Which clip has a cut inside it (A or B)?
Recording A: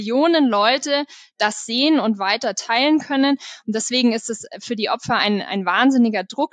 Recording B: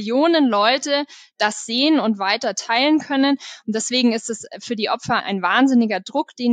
B